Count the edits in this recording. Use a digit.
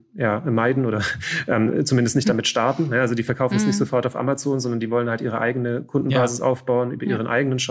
0